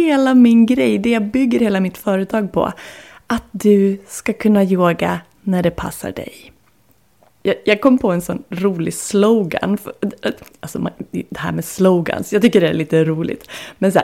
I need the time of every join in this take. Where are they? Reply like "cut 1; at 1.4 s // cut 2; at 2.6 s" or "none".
cut 1; at 7.4 s